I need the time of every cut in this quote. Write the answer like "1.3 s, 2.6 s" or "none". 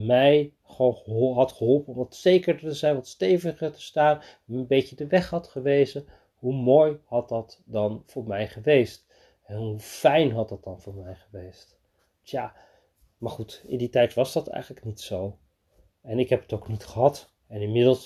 none